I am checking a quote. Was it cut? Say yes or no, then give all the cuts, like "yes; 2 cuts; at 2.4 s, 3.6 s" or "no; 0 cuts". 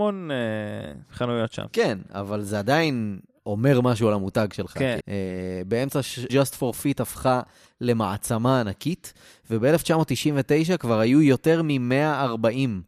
yes; 2 cuts; at 5.0 s, 6.3 s